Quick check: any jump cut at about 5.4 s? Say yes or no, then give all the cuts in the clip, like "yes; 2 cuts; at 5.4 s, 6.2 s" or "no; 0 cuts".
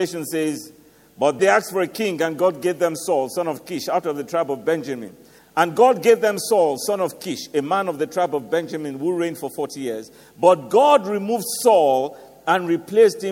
yes; 2 cuts; at 1.4 s, 5.4 s